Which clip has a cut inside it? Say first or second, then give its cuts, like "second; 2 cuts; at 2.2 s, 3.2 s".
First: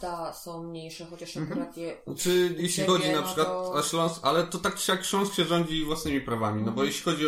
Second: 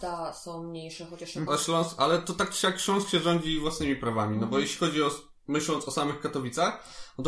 second; 1 cut; at 1.5 s